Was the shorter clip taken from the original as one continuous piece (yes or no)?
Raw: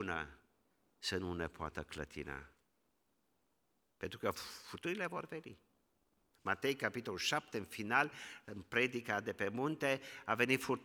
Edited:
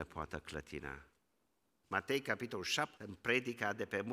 no